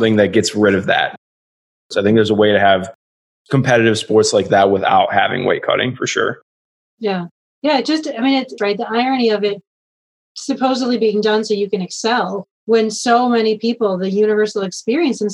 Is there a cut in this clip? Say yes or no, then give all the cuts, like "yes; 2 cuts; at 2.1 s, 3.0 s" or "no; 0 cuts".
yes; 2 cuts; at 8.6 s, 12.6 s